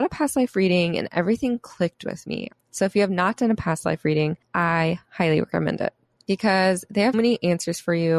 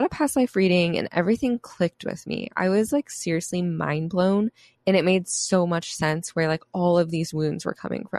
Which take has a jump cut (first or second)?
first